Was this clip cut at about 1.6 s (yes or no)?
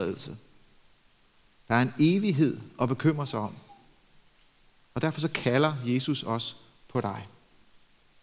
yes